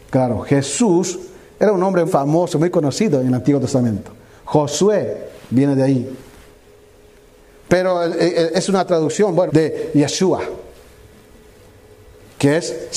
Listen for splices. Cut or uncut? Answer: cut